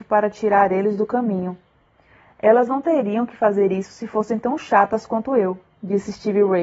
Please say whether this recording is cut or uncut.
uncut